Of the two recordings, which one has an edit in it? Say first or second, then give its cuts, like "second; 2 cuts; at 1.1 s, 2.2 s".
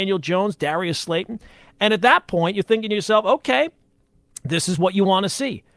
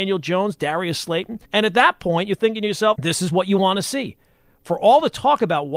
second; 2 cuts; at 1.4 s, 2.9 s